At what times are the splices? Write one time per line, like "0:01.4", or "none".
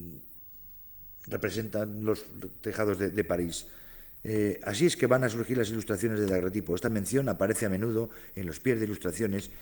none